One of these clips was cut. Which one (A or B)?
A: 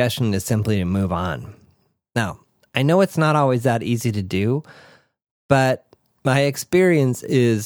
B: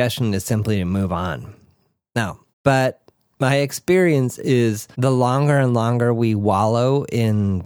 B